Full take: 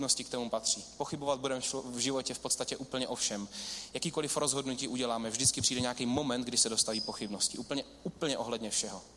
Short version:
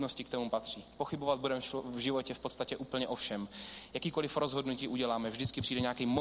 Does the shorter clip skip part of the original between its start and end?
no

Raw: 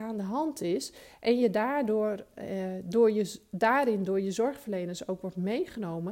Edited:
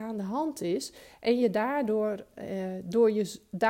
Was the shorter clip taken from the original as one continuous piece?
yes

